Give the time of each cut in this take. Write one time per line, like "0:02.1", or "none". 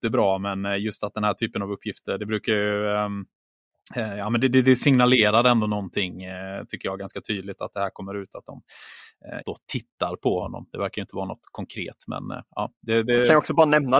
0:09.4